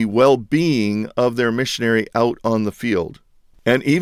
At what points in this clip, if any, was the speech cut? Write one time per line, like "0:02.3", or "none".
none